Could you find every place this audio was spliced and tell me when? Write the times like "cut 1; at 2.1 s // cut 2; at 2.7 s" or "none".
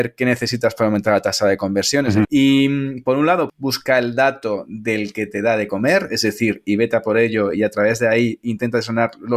cut 1; at 2.2 s // cut 2; at 3.5 s